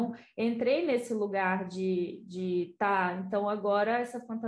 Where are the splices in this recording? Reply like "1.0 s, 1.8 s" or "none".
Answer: none

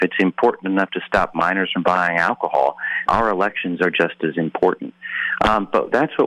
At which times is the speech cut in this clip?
3.1 s

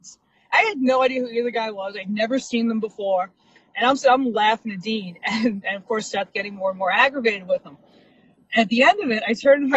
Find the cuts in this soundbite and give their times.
none

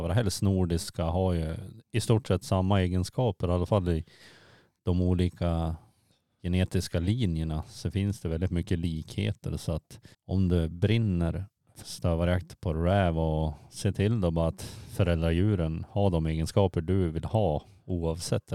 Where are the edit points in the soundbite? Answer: 10.1 s, 11.8 s

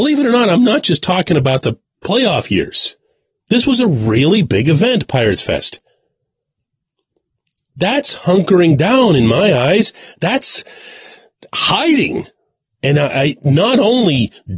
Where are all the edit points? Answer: 3.4 s

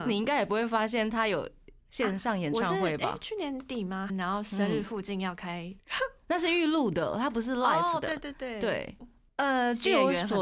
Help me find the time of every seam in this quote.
4.1 s, 5.8 s, 9.0 s

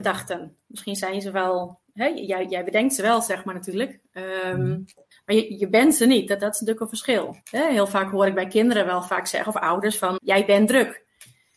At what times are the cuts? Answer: 5.1 s, 7.4 s, 10.2 s

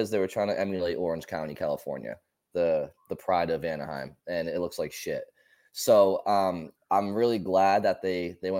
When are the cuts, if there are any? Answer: none

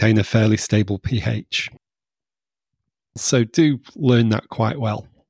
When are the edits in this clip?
3.2 s

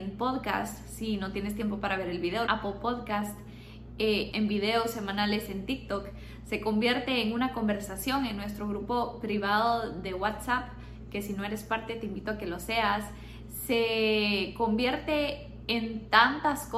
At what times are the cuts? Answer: 2.5 s, 4.3 s

